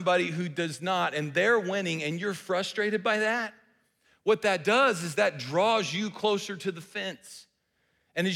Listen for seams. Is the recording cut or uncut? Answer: uncut